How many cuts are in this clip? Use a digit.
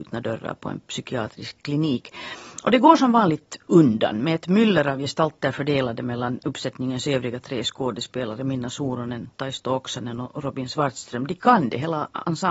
0